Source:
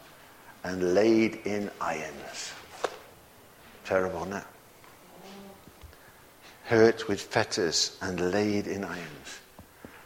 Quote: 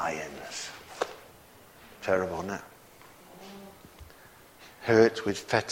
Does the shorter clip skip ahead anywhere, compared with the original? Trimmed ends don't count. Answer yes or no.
no